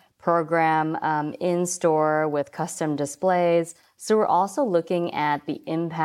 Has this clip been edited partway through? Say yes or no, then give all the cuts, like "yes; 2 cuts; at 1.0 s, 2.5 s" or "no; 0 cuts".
no; 0 cuts